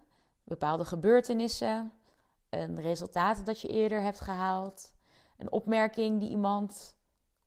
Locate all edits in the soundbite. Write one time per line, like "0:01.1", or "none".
none